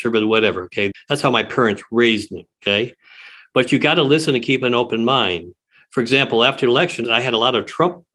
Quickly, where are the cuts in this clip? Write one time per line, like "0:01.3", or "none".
0:00.9